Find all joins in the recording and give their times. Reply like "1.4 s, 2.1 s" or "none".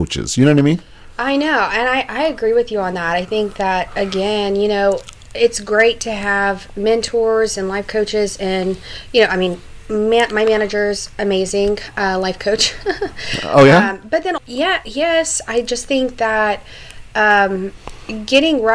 14.4 s